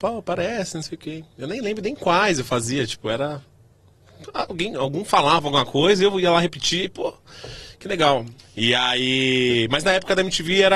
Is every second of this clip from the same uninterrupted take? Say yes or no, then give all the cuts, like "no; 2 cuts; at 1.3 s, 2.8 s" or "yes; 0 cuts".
no; 1 cut; at 8.4 s